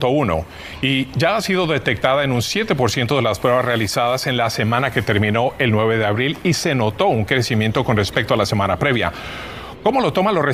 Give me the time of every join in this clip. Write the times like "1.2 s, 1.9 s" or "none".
none